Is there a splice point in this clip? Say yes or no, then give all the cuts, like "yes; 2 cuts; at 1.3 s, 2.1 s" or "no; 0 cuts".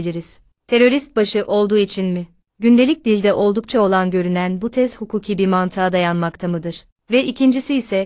no; 0 cuts